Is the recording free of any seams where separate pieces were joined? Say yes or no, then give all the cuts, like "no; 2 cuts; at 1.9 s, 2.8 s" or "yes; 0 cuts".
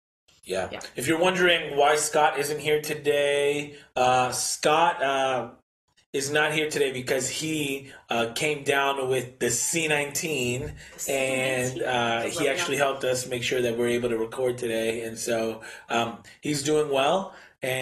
yes; 0 cuts